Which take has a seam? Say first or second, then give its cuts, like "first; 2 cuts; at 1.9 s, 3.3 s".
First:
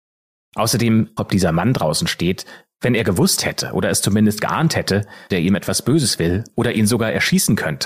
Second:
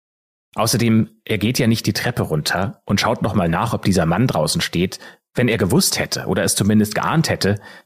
first; 2 cuts; at 1.2 s, 5.3 s